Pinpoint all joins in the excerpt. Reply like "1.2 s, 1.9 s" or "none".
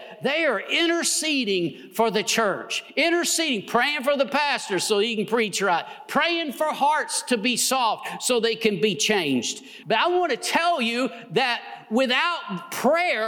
9.8 s